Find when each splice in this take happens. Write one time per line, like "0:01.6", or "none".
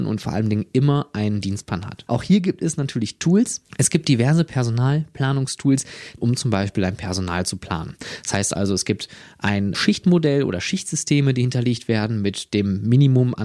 0:02.1
0:06.2
0:09.7